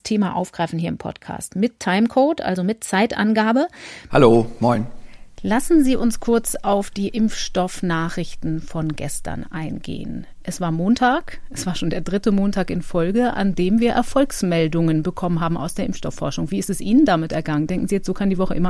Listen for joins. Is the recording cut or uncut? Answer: cut